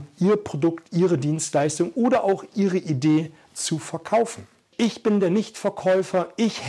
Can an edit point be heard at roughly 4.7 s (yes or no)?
yes